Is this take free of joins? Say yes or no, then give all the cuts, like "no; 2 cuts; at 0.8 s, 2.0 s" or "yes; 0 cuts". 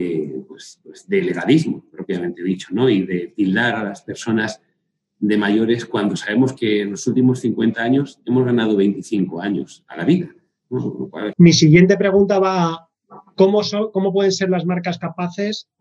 no; 1 cut; at 11.3 s